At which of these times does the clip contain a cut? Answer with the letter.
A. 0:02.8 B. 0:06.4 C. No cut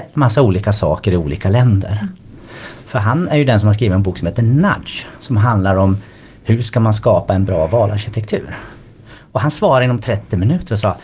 A